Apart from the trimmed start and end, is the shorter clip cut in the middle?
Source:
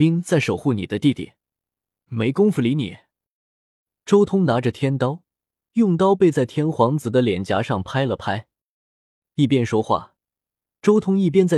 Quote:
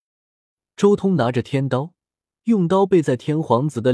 no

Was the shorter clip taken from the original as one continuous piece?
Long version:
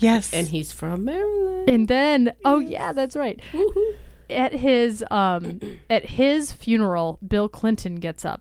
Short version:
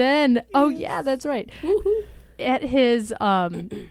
yes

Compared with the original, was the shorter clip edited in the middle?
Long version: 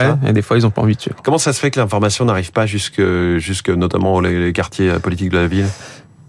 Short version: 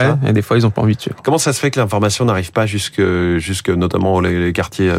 no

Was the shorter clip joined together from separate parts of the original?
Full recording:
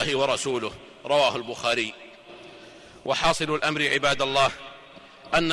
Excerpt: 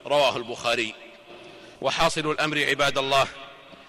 yes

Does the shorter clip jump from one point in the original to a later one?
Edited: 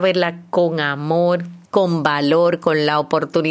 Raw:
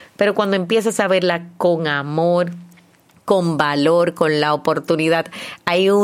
yes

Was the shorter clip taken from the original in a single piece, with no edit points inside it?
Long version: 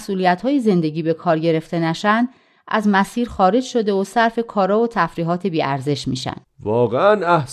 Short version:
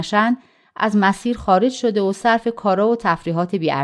yes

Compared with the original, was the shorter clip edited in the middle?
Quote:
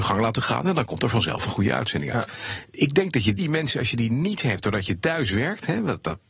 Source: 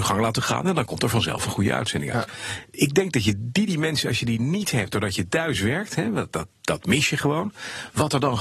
yes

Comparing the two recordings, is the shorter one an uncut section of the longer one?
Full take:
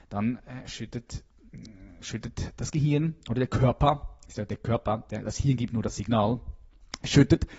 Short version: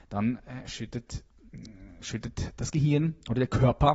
yes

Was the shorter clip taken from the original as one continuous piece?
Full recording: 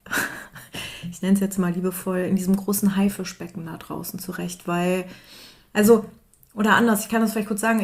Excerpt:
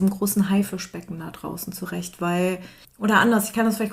no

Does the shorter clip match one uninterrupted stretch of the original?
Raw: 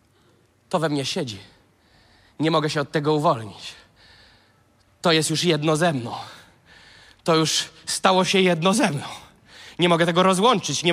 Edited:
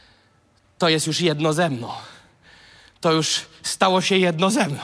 yes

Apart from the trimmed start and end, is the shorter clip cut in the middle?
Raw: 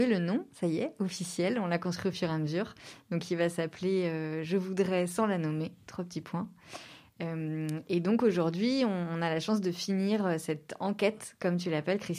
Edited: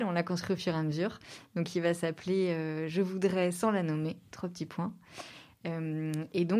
no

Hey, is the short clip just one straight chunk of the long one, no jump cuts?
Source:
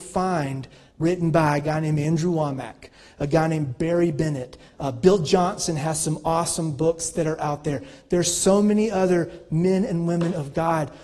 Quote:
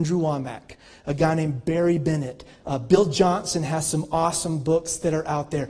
yes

